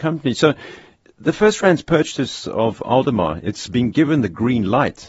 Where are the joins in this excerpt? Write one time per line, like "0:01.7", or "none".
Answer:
none